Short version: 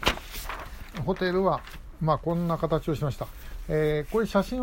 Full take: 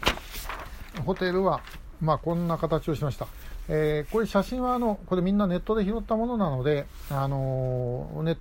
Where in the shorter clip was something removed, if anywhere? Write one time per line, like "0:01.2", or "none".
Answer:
none